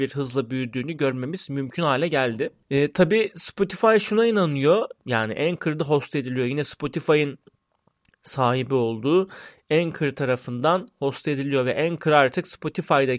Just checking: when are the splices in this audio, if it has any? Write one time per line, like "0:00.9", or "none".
0:05.0